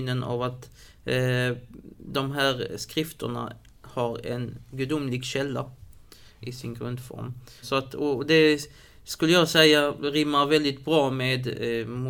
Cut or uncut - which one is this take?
cut